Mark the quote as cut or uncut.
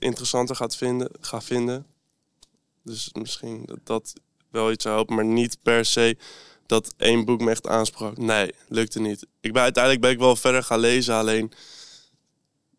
cut